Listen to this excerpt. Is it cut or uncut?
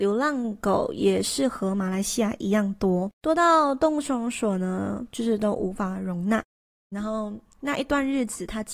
cut